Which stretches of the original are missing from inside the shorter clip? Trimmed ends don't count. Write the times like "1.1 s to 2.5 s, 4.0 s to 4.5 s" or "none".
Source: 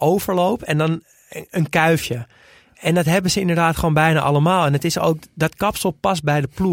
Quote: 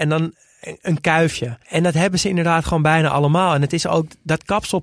2.3 s to 2.7 s